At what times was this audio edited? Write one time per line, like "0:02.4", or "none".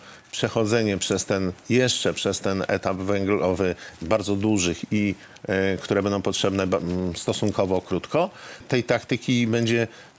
0:04.0
0:08.6